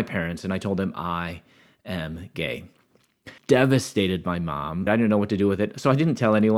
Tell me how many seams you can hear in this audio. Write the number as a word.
two